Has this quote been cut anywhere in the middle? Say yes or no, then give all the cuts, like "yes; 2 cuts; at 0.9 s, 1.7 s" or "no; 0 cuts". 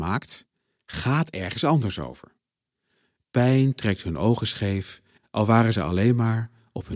yes; 2 cuts; at 3.2 s, 5.2 s